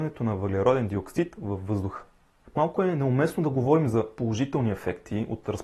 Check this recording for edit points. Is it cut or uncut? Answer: cut